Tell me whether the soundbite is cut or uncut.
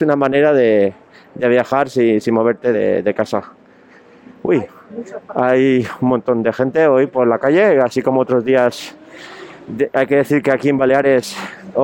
uncut